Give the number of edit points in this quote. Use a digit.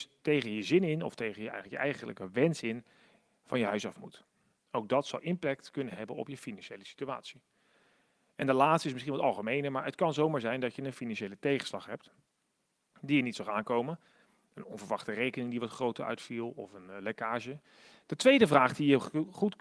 1